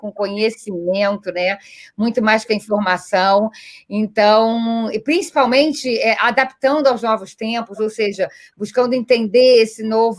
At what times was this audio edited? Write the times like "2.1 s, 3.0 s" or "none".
none